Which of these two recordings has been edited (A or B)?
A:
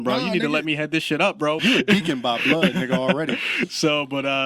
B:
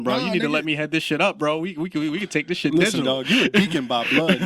A